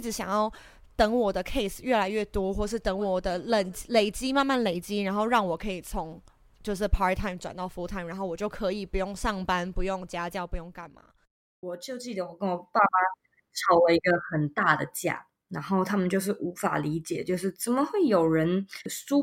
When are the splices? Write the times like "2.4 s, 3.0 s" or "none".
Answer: none